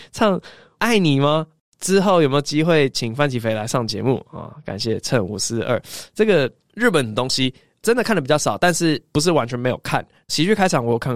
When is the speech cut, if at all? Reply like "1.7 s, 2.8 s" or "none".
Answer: none